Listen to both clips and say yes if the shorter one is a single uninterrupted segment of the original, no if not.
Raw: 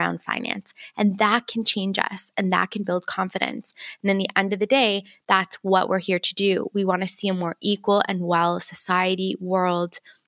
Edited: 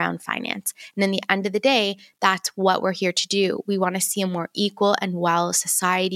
no